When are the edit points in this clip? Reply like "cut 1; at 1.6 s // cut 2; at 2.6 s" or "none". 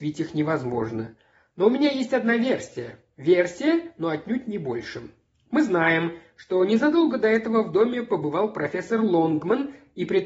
none